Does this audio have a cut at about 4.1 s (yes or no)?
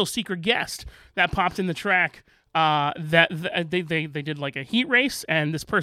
no